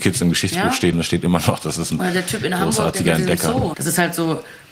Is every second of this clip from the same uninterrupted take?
no; 2 cuts; at 0.9 s, 3.7 s

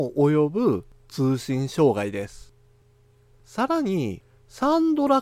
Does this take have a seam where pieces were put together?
no; 0 cuts

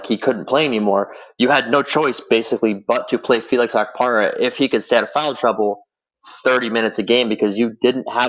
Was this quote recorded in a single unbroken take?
yes; 0 cuts

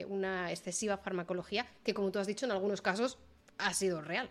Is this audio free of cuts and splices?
yes; 0 cuts

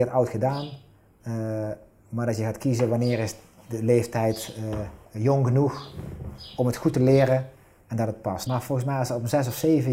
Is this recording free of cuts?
no; 2 cuts; at 5.0 s, 8.5 s

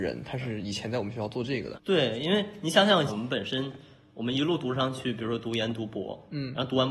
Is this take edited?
yes; 2 cuts; at 1.7 s, 3.1 s

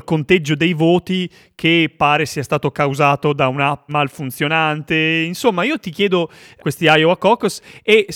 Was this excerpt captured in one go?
no; 2 cuts; at 3.9 s, 6.6 s

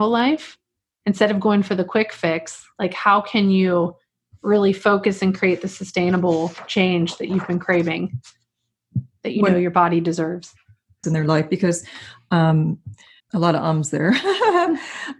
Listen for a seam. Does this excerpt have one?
yes; 2 cuts; at 11.0 s, 13.2 s

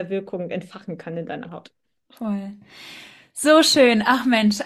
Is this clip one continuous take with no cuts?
yes; 0 cuts

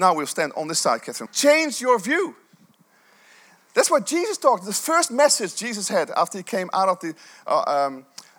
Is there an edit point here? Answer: yes; 1 cut; at 1.3 s

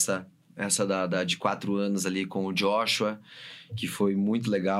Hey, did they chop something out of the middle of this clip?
no; 0 cuts

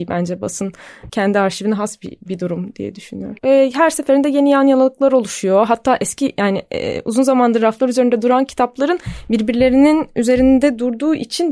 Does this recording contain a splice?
yes; 1 cut; at 3.4 s

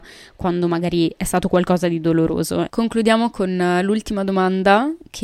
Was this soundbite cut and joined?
yes; 1 cut; at 2.7 s

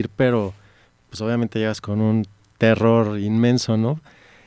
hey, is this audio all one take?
yes; 0 cuts

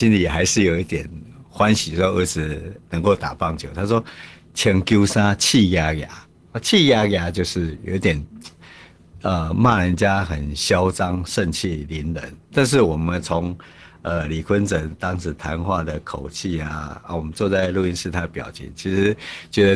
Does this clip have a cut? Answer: no; 0 cuts

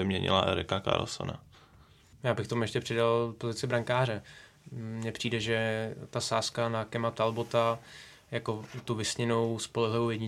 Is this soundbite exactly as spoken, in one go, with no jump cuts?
yes; 0 cuts

